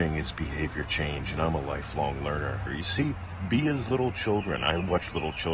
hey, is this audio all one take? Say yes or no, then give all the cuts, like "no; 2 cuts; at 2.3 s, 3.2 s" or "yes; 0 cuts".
no; 1 cut; at 2.7 s